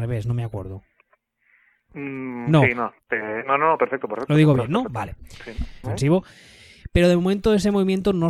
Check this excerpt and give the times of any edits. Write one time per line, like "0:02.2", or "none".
0:05.8